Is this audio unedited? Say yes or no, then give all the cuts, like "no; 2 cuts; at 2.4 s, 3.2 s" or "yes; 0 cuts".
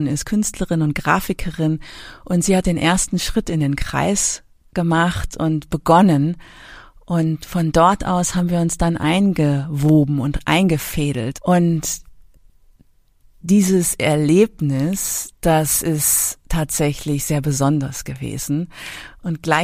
no; 1 cut; at 11.3 s